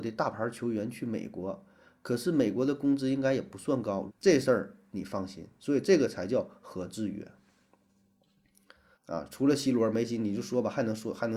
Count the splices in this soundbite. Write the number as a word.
two